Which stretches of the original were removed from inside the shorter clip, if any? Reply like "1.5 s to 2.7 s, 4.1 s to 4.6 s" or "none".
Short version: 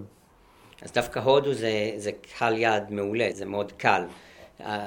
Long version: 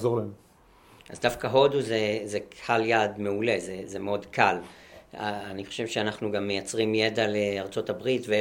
3.6 s to 3.9 s